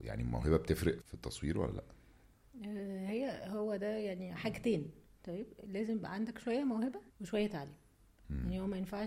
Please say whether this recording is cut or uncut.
cut